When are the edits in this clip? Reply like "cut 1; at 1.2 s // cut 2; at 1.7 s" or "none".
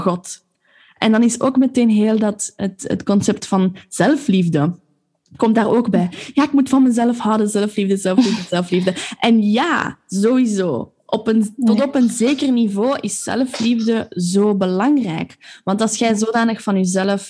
none